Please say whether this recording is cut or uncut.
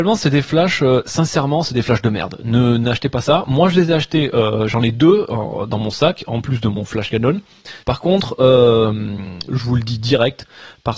cut